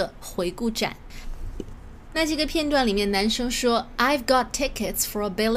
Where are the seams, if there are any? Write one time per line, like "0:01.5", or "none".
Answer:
none